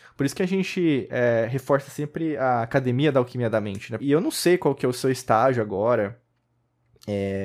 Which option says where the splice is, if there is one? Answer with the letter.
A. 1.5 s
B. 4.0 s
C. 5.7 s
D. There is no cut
B